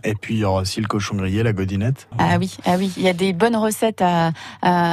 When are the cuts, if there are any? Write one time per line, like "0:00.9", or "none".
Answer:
0:02.1